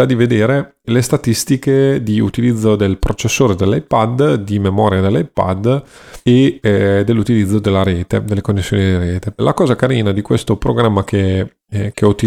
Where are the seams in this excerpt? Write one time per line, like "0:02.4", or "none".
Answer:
0:09.4